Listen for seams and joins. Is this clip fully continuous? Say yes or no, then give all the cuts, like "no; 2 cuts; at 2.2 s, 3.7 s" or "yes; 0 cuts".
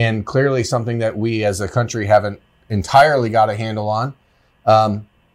yes; 0 cuts